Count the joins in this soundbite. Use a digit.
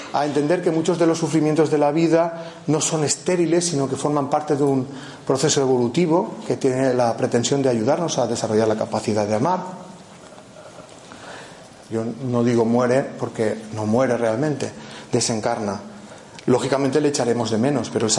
1